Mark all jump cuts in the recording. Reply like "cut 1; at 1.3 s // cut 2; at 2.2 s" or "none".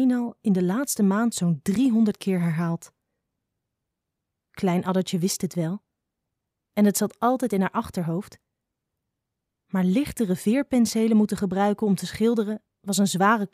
none